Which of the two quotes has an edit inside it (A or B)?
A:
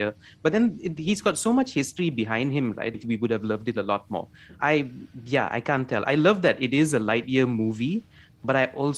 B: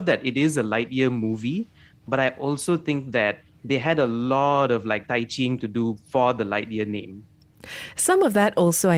A